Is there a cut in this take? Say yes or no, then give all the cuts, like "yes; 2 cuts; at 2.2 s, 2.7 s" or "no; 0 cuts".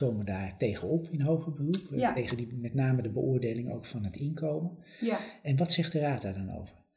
no; 0 cuts